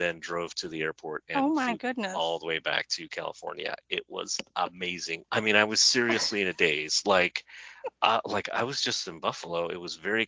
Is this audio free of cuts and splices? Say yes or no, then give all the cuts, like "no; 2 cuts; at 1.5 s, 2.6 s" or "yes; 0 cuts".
no; 1 cut; at 5.3 s